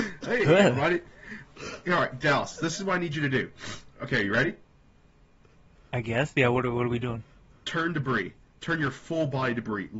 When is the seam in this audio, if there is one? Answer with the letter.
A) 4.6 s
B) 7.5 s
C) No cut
C